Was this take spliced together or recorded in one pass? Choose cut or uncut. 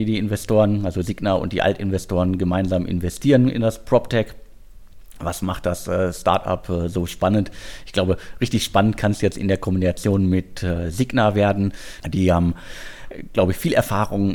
cut